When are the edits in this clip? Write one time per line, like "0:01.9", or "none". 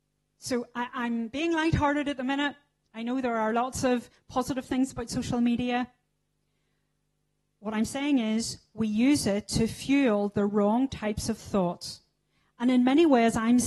none